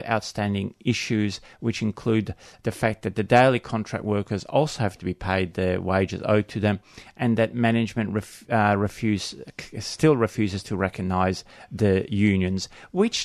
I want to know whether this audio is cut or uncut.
uncut